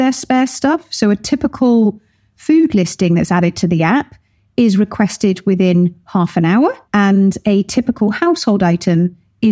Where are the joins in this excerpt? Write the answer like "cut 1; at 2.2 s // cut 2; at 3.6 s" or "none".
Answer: cut 1; at 6.8 s